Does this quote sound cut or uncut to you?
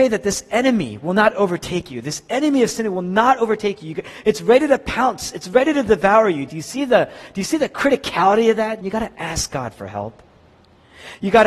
cut